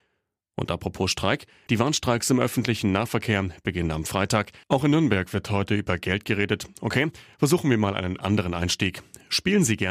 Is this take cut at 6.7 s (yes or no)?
no